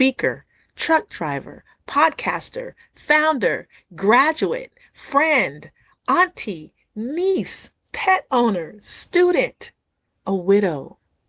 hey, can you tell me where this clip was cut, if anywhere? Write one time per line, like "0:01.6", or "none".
none